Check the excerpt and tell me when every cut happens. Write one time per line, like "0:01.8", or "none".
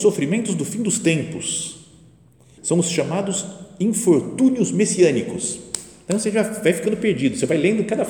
0:02.6